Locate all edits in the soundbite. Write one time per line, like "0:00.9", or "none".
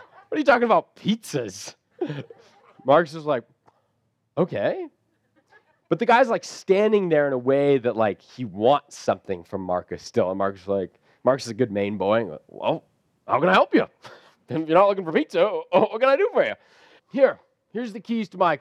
0:17.0